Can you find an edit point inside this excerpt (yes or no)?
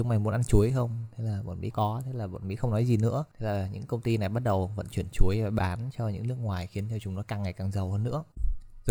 yes